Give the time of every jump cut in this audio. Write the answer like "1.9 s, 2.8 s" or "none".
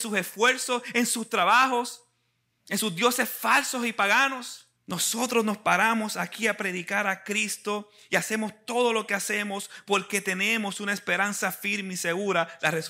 2.5 s, 4.8 s